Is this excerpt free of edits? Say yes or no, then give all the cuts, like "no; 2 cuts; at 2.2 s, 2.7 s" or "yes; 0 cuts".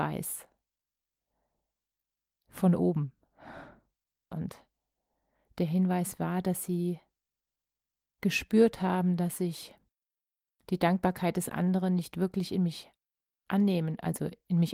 no; 1 cut; at 4.3 s